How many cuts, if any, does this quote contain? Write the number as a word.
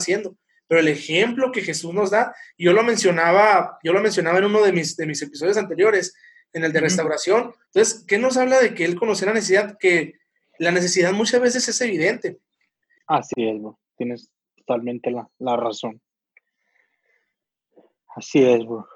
two